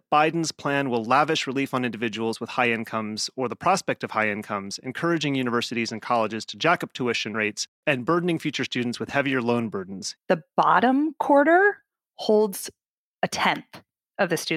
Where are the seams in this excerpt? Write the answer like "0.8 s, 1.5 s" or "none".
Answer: 10.2 s